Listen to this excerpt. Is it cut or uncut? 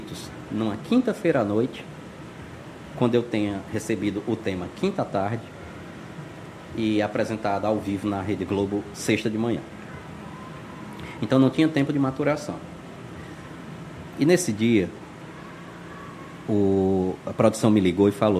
cut